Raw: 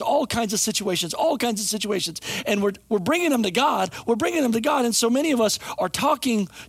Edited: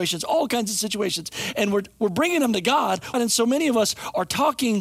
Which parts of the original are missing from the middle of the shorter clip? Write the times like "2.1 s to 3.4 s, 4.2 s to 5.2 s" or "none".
4.0 s to 4.8 s